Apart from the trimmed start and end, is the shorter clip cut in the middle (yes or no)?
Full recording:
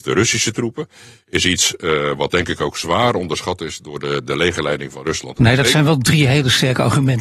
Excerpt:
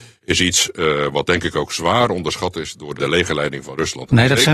yes